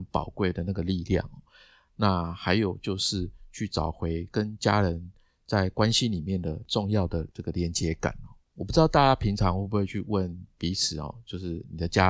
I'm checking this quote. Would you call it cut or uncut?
uncut